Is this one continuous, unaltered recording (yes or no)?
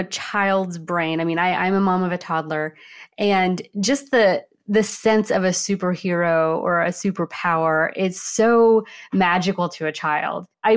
yes